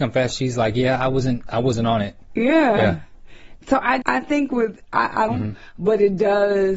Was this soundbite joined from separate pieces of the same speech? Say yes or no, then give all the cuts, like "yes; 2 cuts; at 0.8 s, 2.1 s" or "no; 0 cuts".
yes; 2 cuts; at 4.0 s, 5.3 s